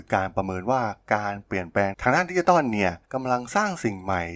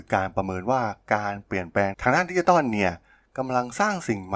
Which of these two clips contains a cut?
first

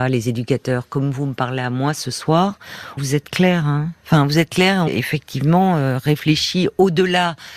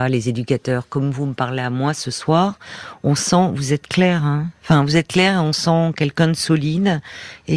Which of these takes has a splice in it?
first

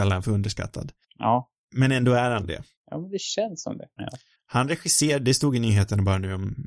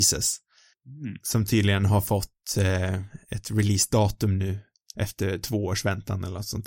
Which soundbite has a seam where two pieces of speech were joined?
first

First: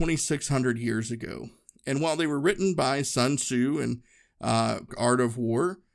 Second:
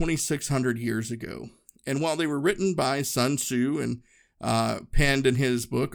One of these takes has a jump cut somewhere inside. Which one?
first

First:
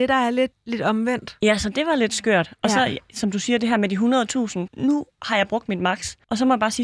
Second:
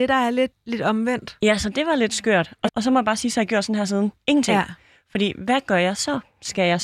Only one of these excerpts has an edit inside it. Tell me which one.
second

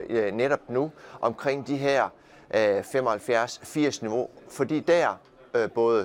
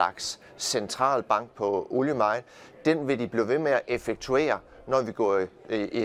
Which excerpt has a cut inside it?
first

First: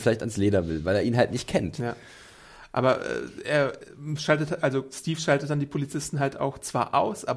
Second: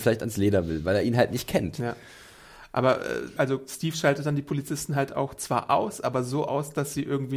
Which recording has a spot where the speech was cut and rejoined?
second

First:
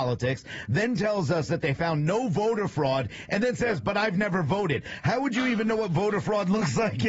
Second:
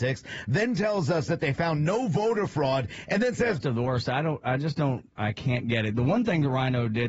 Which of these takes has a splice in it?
second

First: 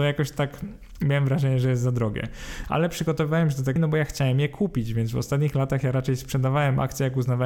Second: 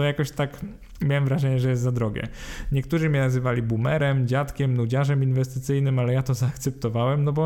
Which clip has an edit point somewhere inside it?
first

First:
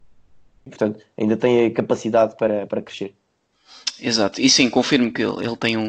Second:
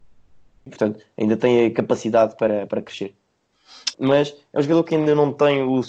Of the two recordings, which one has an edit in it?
second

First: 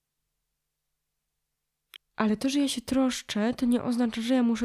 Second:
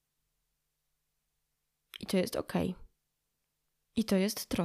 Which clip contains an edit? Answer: first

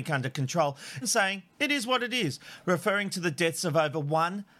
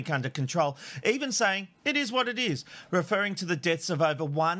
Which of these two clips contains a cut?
first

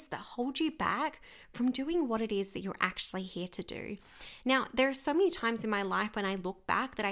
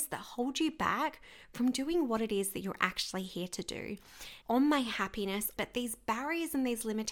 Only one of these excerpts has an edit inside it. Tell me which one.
second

